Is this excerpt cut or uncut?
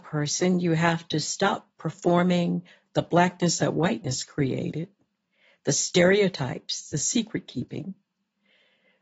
uncut